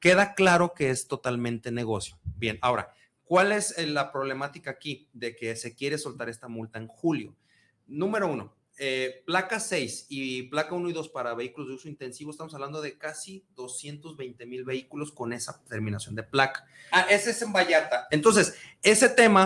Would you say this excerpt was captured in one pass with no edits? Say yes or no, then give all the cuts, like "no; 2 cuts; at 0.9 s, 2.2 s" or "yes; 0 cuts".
no; 2 cuts; at 16.9 s, 18.1 s